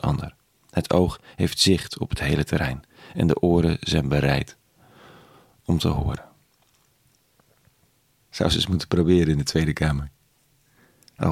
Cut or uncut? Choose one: cut